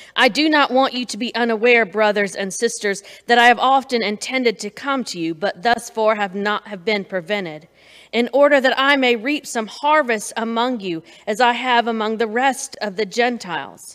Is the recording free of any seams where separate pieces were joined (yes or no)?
yes